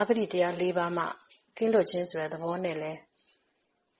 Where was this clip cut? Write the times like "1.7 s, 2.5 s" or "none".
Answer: none